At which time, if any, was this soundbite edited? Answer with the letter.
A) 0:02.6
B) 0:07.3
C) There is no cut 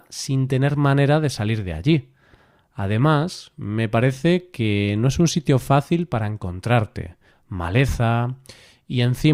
B